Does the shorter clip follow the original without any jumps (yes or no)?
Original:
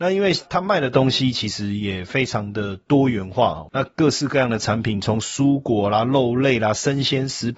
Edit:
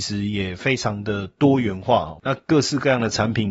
yes